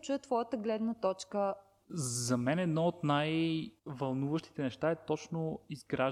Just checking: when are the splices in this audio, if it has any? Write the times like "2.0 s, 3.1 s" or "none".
1.8 s, 3.8 s